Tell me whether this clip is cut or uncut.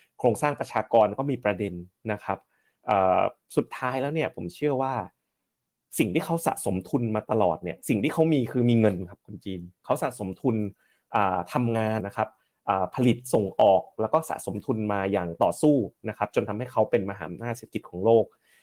cut